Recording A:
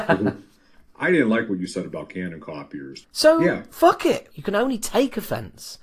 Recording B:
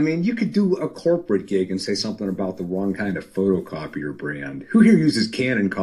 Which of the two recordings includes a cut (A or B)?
A